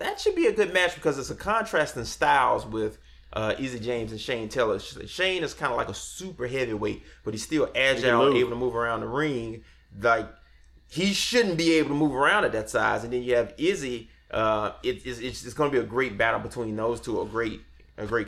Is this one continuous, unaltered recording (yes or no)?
yes